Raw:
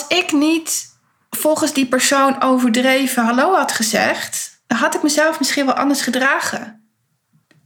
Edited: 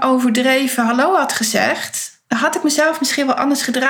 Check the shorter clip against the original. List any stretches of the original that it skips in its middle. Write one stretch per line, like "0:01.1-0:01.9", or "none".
none